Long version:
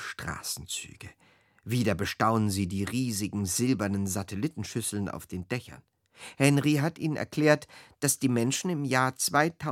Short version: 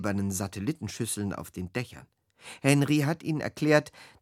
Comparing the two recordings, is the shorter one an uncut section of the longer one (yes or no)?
yes